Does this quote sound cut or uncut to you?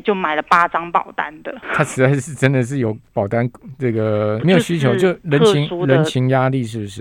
cut